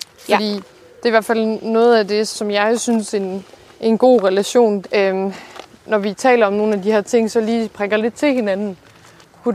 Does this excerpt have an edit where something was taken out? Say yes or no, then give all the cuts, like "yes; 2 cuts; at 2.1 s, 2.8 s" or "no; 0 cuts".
yes; 2 cuts; at 2.3 s, 4.8 s